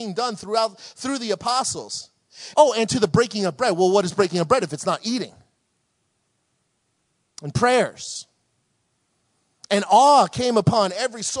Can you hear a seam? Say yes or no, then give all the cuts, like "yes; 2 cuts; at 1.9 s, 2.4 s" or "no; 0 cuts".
yes; 1 cut; at 2.5 s